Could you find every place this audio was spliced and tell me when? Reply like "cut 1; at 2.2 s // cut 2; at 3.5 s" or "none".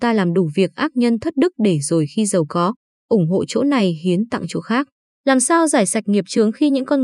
cut 1; at 2.9 s // cut 2; at 5.1 s